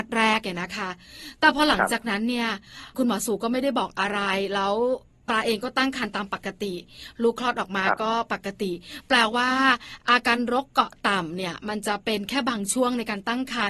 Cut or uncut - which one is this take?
uncut